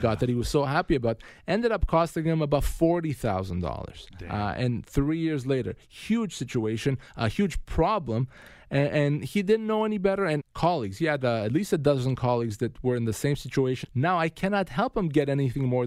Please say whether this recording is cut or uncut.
cut